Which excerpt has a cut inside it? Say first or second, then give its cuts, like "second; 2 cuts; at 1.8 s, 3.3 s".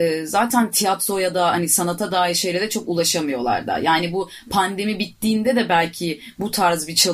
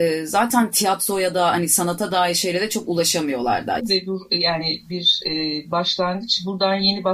second; 1 cut; at 3.8 s